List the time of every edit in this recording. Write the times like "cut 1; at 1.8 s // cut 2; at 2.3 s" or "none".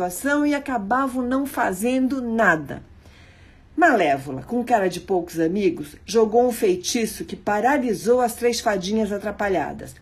none